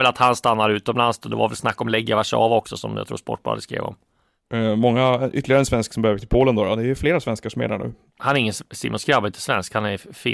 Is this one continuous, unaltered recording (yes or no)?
yes